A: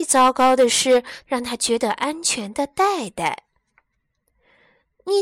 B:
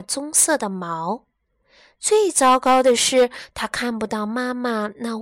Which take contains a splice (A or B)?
A